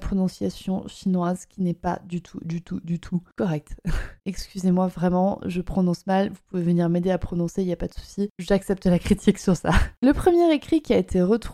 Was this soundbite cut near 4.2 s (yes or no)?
yes